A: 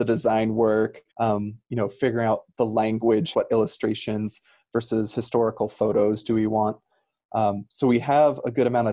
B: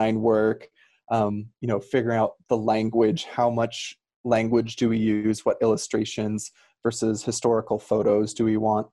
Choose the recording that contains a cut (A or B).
A